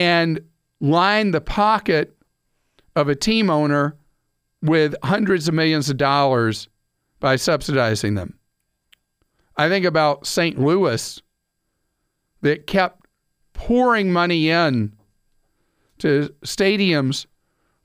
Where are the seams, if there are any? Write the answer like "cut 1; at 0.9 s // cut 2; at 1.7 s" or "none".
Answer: cut 1; at 13.4 s